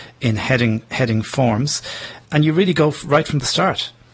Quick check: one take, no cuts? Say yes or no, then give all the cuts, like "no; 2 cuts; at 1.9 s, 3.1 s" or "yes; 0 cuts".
no; 1 cut; at 2.2 s